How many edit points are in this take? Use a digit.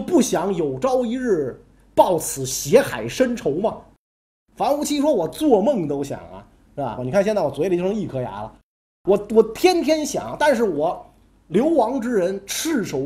1